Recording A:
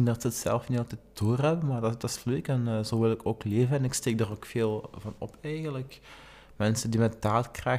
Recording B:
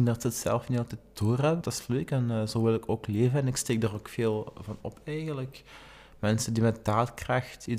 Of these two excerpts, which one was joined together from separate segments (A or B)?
B